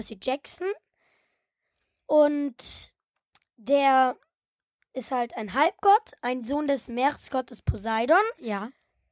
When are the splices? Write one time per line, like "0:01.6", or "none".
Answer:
none